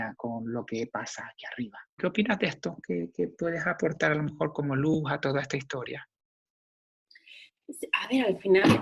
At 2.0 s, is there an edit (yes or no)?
yes